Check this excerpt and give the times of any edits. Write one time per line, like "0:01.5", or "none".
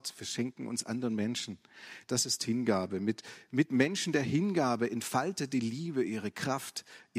0:02.0